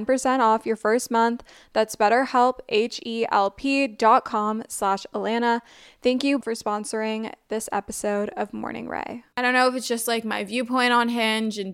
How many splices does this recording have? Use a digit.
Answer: 2